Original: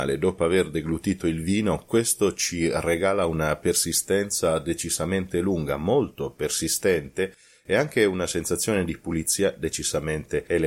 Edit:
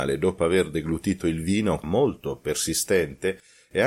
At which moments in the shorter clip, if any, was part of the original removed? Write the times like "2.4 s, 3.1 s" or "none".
1.8 s